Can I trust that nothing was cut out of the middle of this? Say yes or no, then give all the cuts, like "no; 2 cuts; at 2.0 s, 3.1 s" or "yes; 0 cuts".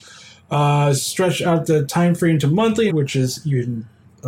no; 1 cut; at 2.9 s